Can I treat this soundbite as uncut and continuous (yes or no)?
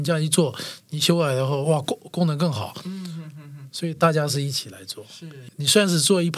yes